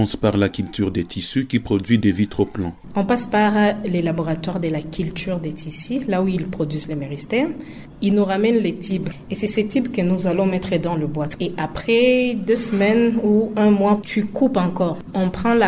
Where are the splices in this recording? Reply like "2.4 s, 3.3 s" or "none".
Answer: 14.0 s